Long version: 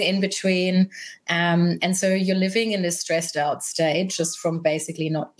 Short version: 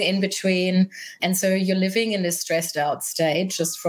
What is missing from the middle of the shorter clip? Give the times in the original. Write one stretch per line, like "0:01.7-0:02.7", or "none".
0:01.2-0:01.8